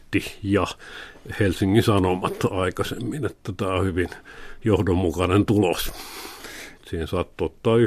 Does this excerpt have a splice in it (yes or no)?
yes